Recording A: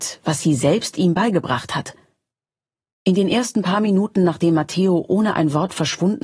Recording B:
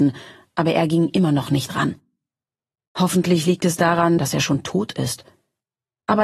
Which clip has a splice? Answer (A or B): B